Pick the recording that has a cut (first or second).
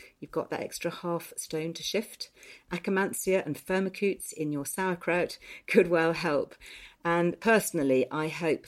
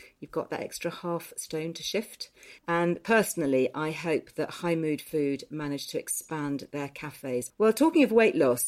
second